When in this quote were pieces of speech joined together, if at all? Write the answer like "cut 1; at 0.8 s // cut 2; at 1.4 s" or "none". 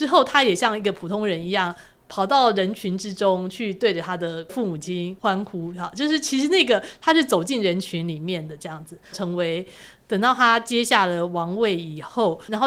cut 1; at 9.1 s

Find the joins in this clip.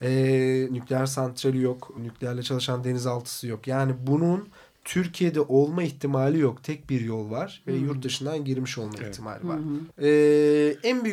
cut 1; at 2.0 s // cut 2; at 9.9 s

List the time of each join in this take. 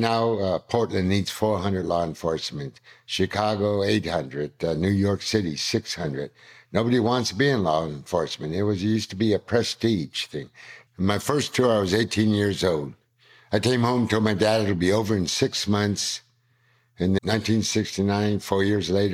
cut 1; at 10.9 s // cut 2; at 17.2 s

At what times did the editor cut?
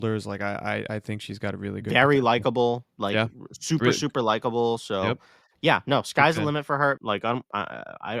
cut 1; at 7.0 s

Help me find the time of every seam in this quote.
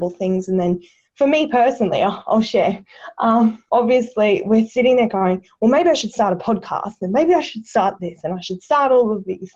cut 1; at 3.7 s

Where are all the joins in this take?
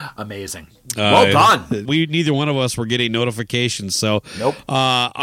cut 1; at 1.9 s

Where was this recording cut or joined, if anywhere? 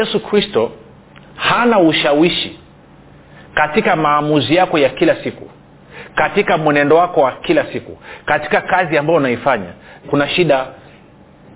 cut 1; at 10.0 s

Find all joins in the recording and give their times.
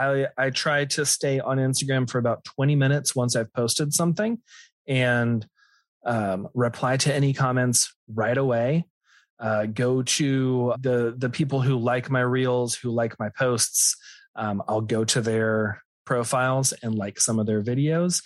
cut 1; at 10.7 s

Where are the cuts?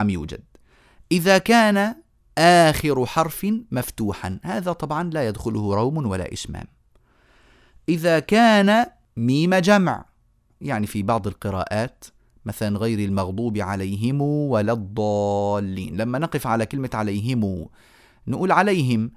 cut 1; at 10.5 s

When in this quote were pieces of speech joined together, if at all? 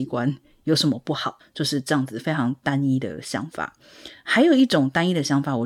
cut 1; at 1.4 s

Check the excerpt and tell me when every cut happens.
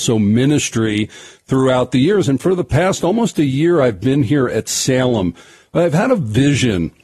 none

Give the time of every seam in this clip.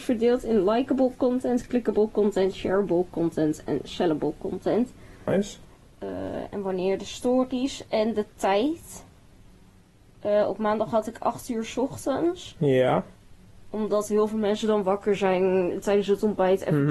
cut 1; at 5.3 s

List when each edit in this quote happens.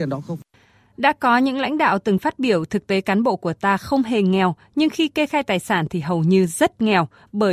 none

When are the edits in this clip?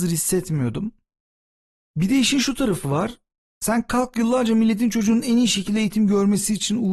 none

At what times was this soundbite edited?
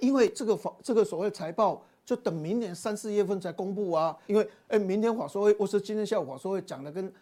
cut 1; at 4.3 s

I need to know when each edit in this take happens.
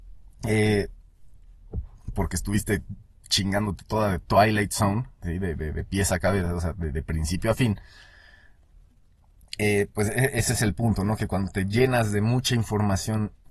none

